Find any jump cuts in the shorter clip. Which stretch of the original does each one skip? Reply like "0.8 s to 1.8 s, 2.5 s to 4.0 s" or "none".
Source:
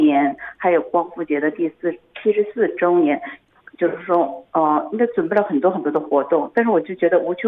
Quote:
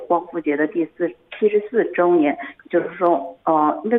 3.4 s to 3.7 s